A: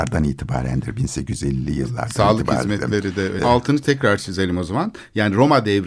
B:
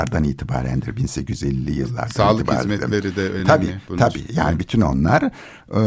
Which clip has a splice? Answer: A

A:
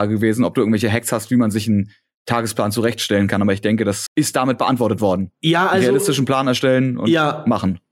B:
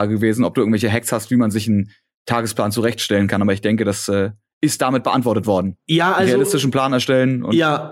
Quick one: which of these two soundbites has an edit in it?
A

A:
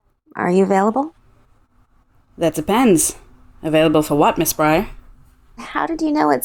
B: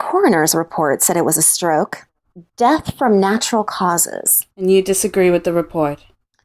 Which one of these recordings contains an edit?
B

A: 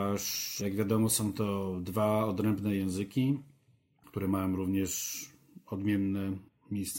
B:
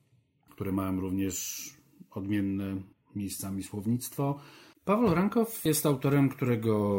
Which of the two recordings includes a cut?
B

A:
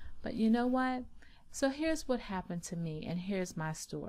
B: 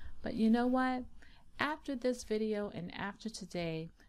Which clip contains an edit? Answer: A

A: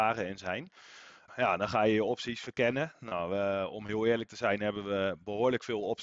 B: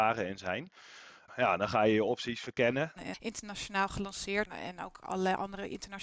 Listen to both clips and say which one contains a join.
B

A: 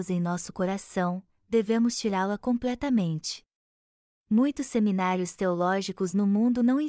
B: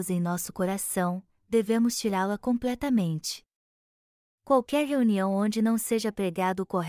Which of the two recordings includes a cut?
A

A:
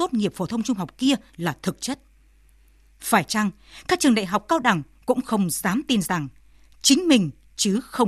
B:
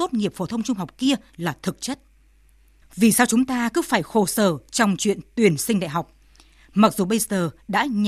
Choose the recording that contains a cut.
B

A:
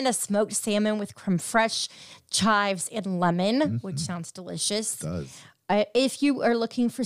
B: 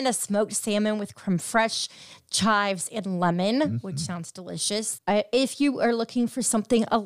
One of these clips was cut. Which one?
B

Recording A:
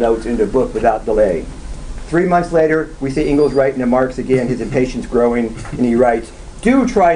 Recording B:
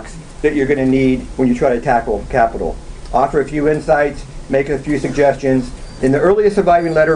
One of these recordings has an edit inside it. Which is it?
B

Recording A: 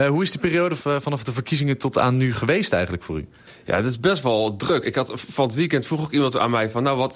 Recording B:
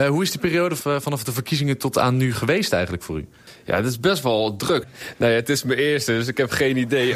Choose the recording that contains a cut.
B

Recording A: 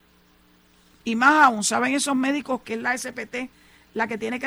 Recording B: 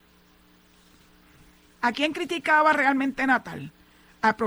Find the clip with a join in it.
A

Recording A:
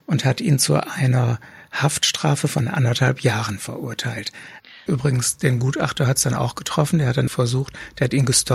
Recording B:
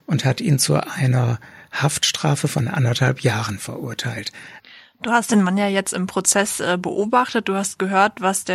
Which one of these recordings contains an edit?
A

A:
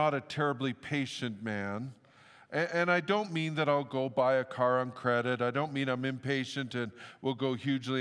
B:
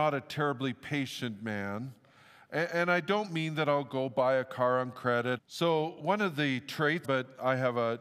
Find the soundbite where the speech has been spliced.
B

